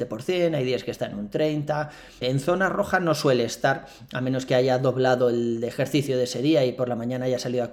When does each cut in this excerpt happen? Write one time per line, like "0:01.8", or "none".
0:02.2